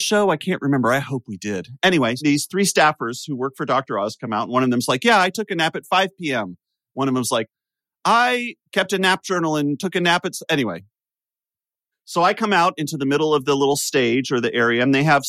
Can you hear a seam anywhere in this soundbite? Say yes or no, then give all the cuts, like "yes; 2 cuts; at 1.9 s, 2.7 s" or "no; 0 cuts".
yes; 3 cuts; at 2.2 s, 8.7 s, 11.9 s